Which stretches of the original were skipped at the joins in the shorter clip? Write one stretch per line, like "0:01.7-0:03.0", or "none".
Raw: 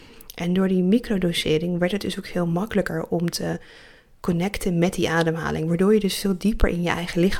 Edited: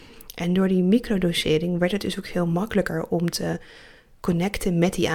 none